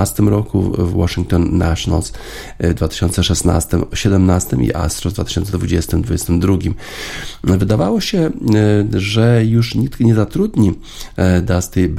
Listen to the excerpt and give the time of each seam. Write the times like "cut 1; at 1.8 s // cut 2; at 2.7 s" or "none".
none